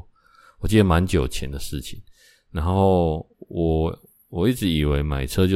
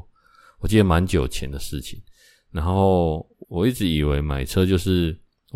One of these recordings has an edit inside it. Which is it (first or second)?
second